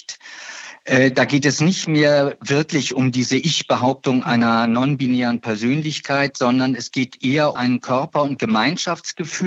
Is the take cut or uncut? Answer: cut